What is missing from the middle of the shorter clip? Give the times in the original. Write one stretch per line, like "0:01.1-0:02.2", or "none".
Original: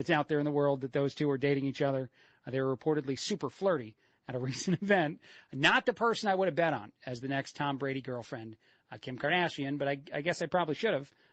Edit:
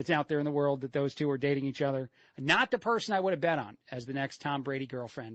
0:02.3-0:05.4